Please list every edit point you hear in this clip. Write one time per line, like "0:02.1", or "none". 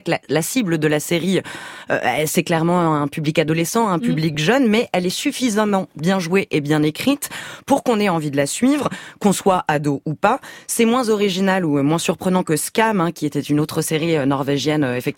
none